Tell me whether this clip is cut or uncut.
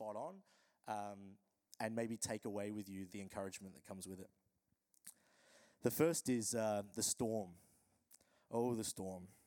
cut